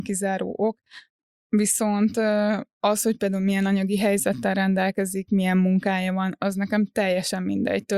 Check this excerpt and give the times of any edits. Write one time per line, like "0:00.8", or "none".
none